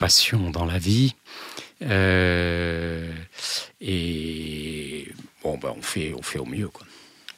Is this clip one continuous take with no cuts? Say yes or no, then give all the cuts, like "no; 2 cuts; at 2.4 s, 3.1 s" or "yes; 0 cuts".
yes; 0 cuts